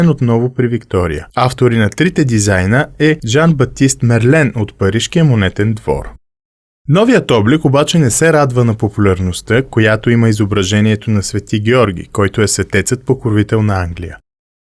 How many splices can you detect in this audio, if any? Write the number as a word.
one